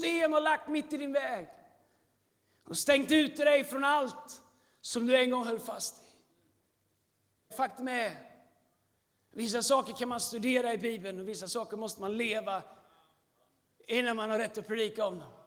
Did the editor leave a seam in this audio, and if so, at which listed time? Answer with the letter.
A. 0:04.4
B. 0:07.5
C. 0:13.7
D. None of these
B